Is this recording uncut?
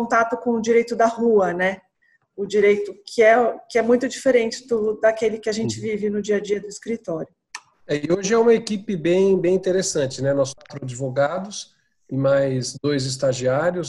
yes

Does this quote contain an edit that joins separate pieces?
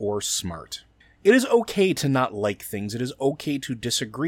no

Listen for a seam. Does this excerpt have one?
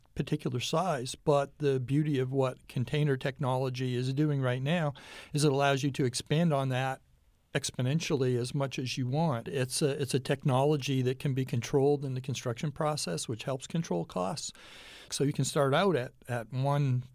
yes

